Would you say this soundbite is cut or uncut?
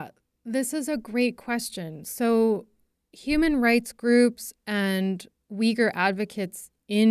uncut